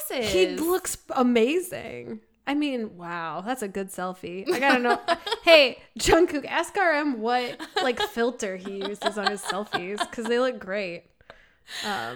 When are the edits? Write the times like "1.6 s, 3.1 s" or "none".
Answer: none